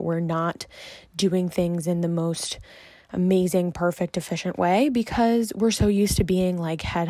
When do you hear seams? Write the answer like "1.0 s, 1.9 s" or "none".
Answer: none